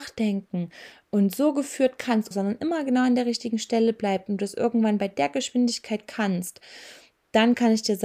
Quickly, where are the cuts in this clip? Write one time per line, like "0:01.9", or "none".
0:02.3

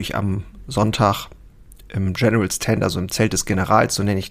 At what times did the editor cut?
none

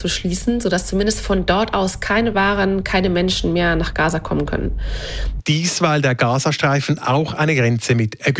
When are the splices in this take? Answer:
0:05.4

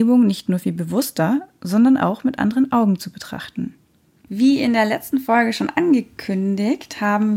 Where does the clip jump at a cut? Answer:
0:04.3

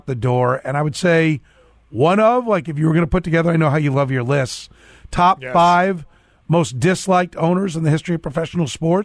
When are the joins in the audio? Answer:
none

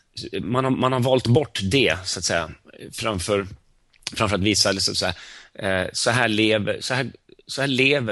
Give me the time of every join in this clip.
none

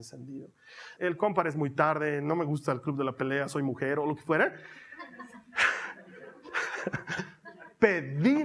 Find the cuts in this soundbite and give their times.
0:01.0

